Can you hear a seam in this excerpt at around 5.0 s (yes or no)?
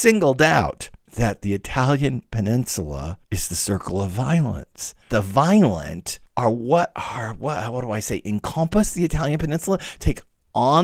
yes